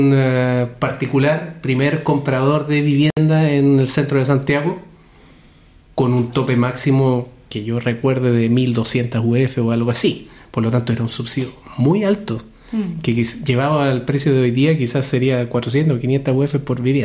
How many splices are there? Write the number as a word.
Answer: zero